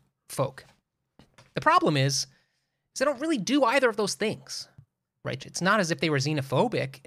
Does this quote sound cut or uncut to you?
cut